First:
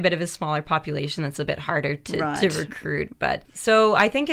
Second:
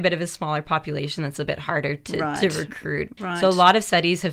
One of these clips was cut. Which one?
second; 1 cut; at 3.2 s

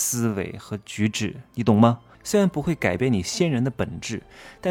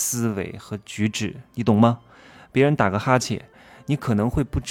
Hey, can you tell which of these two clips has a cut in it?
first; 1 cut; at 2.1 s

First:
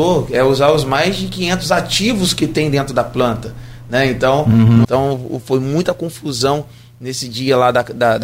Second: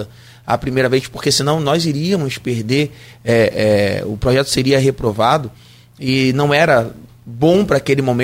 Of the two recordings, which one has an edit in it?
first; 1 cut; at 4.8 s

